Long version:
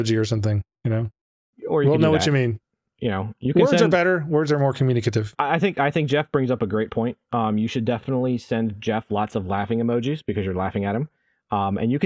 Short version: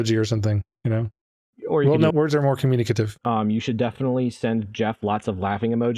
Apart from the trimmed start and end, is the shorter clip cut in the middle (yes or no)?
yes